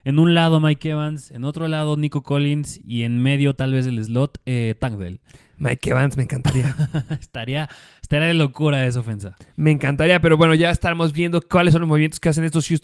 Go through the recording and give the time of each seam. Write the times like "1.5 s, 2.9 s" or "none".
none